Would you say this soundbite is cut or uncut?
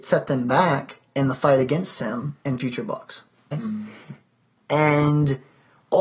cut